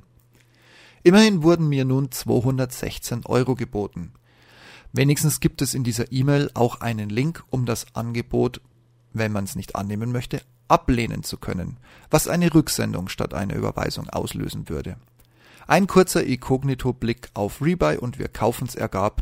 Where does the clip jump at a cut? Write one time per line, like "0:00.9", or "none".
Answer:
none